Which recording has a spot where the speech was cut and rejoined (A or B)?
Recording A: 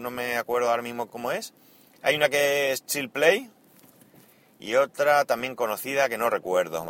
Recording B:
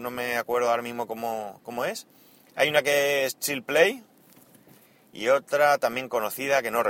A